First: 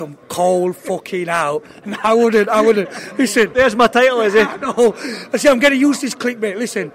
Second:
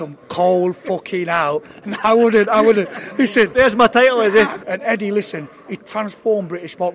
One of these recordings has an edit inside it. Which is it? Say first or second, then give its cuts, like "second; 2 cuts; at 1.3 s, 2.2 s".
second; 2 cuts; at 4.6 s, 5.8 s